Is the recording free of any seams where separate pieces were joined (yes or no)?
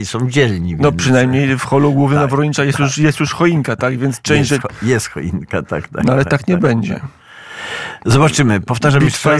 yes